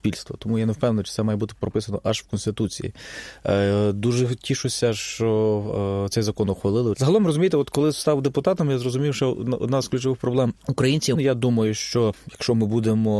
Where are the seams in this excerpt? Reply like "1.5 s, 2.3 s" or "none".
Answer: 6.9 s, 11.1 s